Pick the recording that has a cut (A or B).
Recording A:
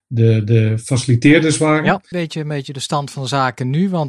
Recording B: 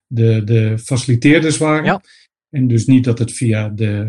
A